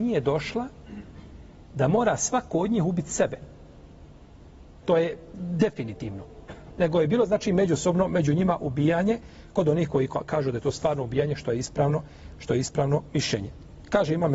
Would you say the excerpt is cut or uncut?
cut